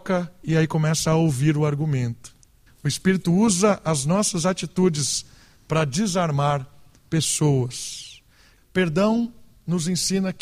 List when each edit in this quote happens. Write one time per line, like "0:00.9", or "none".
0:02.7
0:08.6